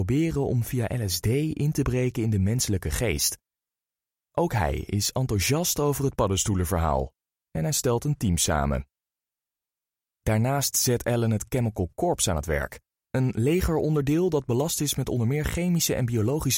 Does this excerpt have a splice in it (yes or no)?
no